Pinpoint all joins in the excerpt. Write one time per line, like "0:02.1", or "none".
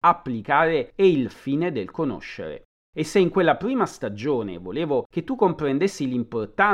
none